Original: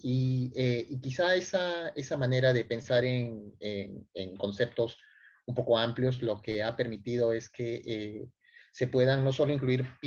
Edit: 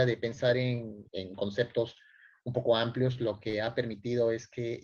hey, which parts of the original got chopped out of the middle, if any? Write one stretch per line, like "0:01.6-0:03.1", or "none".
0:03.6-0:04.1